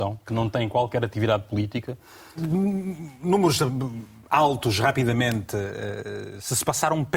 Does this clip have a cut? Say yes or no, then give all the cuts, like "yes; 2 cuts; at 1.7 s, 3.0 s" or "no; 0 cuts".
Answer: yes; 1 cut; at 2.4 s